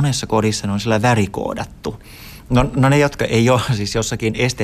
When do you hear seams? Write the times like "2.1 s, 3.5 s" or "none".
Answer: 2.5 s